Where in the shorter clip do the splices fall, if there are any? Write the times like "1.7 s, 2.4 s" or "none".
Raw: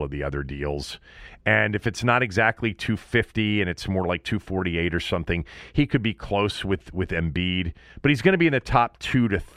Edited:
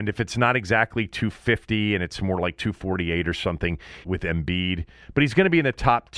4.0 s